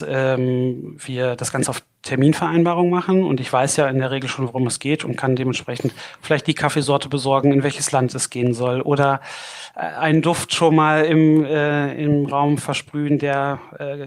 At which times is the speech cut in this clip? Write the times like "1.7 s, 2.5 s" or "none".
none